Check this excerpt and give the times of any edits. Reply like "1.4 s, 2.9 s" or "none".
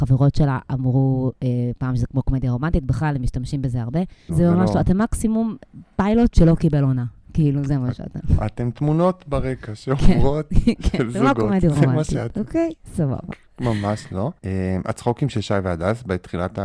4.3 s, 14.4 s